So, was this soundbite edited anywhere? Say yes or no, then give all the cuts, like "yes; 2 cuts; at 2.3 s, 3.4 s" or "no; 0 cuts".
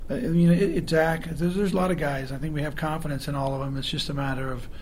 no; 0 cuts